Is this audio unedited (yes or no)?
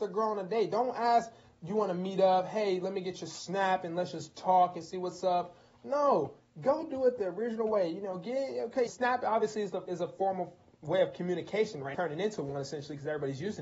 no